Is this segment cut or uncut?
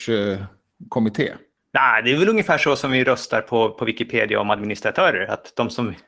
uncut